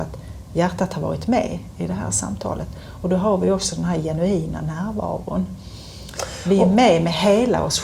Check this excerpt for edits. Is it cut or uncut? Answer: uncut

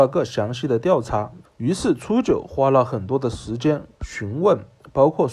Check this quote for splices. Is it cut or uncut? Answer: cut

